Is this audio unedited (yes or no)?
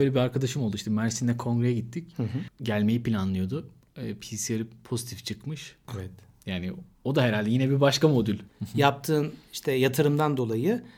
no